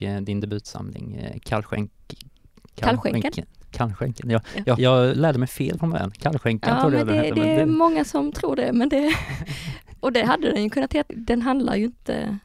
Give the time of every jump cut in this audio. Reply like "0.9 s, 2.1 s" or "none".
4.8 s, 11.1 s

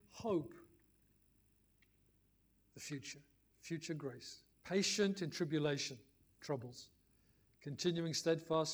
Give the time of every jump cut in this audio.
4.5 s

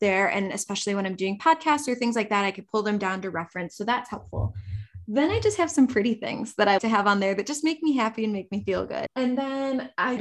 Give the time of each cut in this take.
6.8 s, 9.1 s

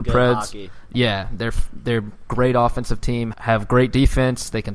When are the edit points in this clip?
3.3 s

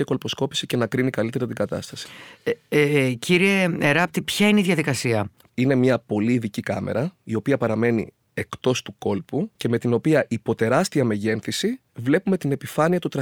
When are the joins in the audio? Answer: 5.5 s, 9.5 s

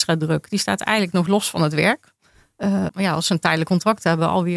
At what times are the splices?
2.9 s

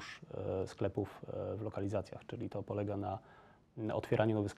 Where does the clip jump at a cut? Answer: none

